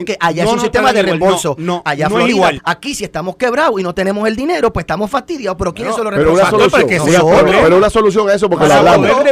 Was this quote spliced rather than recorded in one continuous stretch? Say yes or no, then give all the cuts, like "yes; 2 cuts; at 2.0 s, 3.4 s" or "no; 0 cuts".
yes; 1 cut; at 2.6 s